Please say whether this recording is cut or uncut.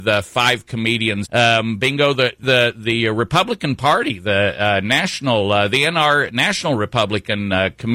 cut